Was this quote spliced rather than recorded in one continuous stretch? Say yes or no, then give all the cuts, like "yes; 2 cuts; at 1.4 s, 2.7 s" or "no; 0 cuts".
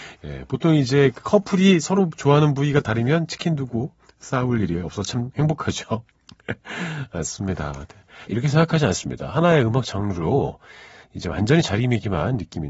yes; 1 cut; at 8.3 s